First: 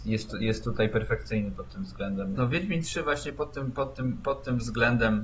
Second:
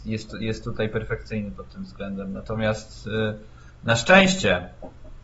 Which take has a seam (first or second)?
first